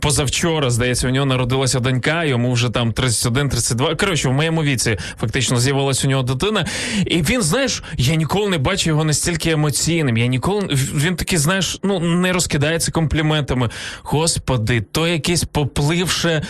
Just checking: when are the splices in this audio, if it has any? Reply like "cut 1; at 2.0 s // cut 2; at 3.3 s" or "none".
none